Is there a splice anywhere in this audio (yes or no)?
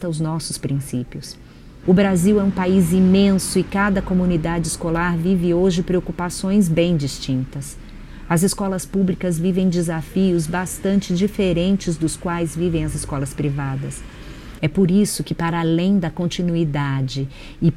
yes